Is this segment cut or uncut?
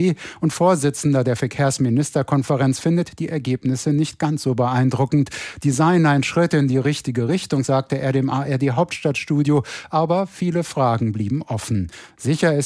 uncut